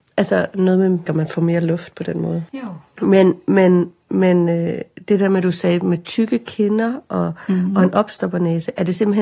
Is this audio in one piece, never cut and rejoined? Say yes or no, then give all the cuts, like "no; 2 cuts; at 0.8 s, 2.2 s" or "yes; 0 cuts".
no; 2 cuts; at 1.1 s, 2.5 s